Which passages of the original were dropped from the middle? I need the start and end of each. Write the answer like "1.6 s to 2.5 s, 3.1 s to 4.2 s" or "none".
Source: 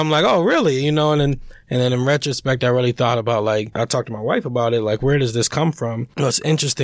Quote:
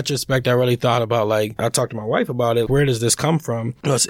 4.8 s to 5.0 s